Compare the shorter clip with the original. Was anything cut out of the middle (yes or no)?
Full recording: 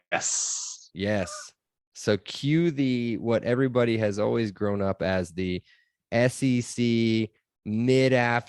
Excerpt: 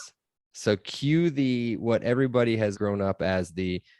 yes